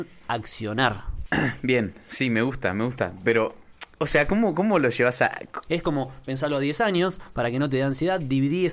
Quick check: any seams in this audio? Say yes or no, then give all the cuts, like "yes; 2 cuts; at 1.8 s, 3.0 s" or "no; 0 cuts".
yes; 1 cut; at 5.7 s